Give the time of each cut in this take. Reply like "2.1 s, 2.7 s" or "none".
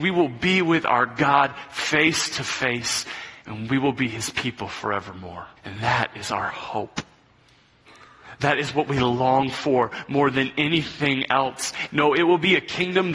5.6 s, 11.9 s

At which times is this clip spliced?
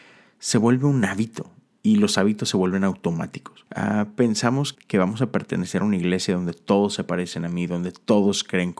3.7 s, 4.7 s

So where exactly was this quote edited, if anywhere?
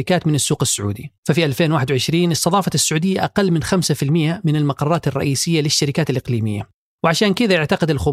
1.2 s

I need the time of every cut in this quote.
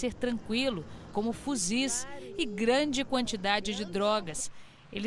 1.1 s

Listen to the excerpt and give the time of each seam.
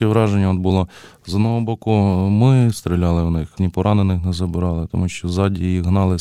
3.6 s

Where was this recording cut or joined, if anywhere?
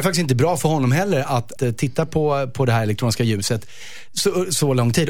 1.6 s

